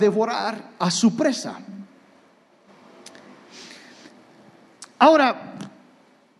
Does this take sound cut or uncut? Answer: uncut